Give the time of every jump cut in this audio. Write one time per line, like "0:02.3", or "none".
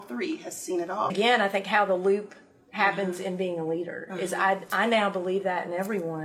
0:01.1